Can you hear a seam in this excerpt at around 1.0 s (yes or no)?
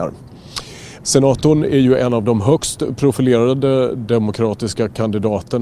yes